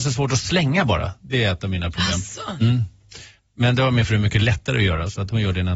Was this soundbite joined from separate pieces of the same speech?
no; 0 cuts

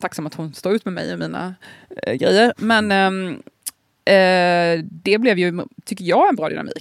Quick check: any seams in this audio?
no; 0 cuts

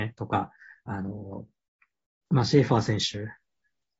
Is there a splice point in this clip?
no; 0 cuts

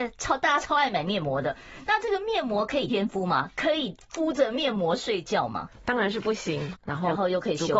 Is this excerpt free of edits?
no; 2 cuts; at 2.9 s, 6.7 s

